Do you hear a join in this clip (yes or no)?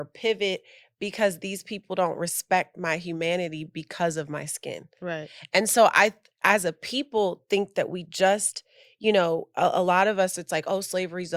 no